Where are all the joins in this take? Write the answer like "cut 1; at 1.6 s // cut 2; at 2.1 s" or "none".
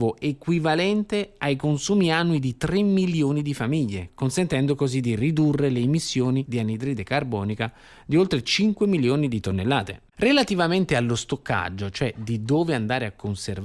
cut 1; at 10.1 s